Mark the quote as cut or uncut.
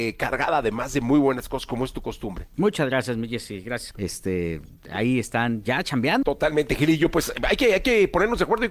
cut